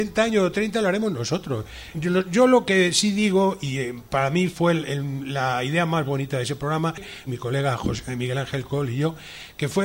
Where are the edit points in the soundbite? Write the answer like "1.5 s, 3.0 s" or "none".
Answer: 1.9 s, 7.3 s